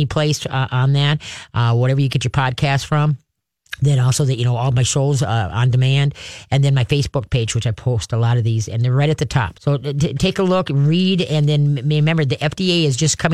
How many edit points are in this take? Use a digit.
1